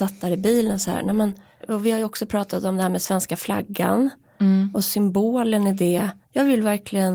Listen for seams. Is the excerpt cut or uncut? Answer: cut